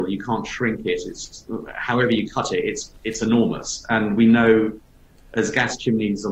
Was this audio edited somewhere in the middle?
no; 0 cuts

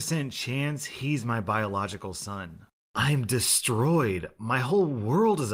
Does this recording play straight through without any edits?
yes; 0 cuts

